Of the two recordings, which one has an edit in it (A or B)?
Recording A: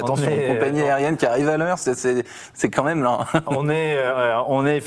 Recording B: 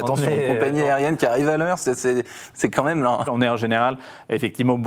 B